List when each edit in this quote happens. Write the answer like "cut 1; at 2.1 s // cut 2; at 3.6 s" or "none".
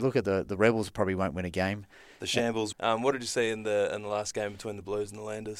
cut 1; at 2.7 s